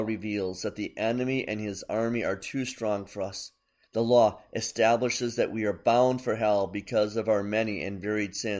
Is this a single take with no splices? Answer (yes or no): no